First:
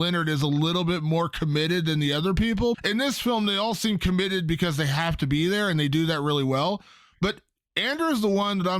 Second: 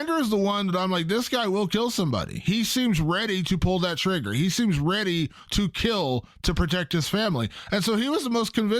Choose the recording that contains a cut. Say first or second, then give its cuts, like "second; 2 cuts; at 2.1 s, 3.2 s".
first; 1 cut; at 2.7 s